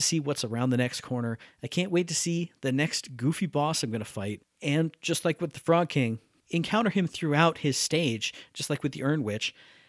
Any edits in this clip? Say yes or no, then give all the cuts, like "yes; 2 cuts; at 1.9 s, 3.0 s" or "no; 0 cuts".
no; 0 cuts